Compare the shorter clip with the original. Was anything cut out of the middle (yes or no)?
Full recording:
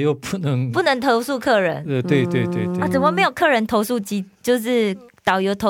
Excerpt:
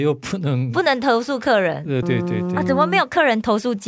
yes